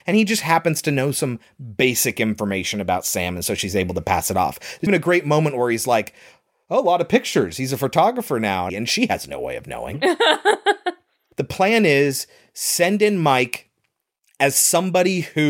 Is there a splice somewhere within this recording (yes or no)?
yes